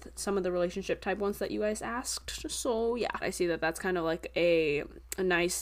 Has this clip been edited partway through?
yes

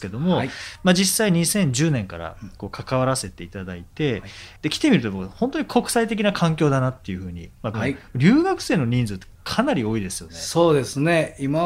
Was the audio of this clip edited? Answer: yes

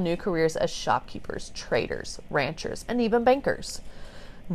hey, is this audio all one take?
no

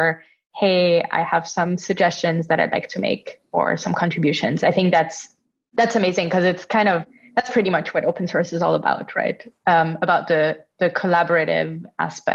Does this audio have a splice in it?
no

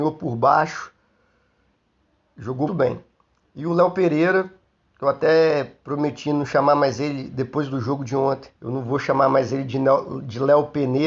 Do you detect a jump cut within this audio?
yes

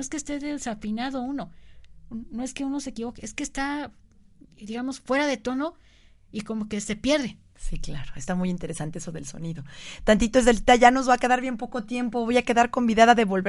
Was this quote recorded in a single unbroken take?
yes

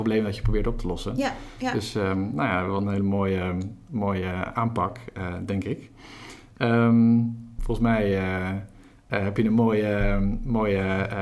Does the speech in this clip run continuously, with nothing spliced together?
no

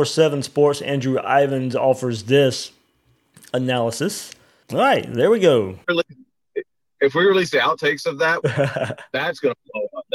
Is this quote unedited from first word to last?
no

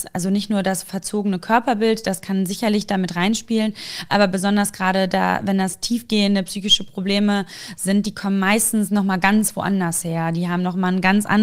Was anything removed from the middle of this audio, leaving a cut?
no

